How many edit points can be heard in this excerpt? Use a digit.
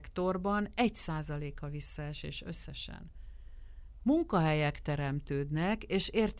0